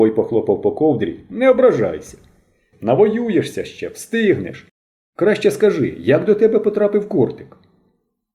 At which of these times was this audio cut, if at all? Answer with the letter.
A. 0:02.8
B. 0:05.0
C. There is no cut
C